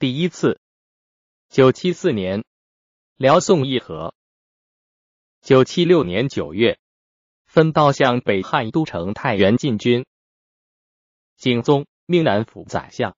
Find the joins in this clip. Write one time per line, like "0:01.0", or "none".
0:01.4
0:07.3